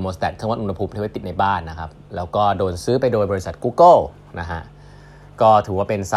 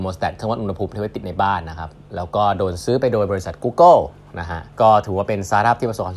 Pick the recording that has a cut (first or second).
second